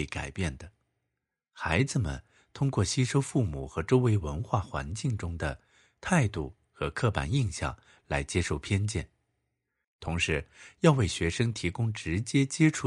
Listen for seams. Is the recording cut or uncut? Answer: cut